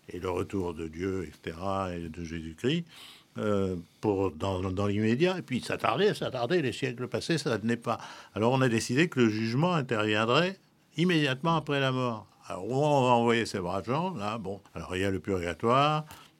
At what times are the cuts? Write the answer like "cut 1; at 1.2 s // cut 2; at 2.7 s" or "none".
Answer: cut 1; at 14.7 s